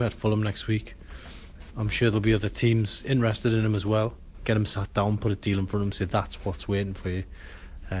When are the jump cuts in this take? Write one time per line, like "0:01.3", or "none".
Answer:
0:01.7
0:04.4